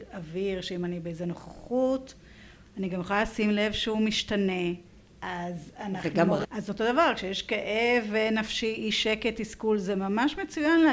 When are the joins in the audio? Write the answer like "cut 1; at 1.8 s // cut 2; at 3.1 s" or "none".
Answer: cut 1; at 6.4 s